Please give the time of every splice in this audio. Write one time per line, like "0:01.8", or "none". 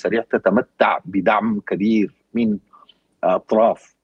none